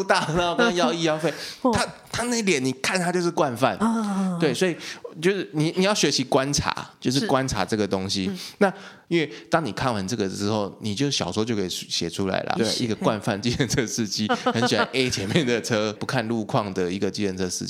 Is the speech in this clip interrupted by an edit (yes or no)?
yes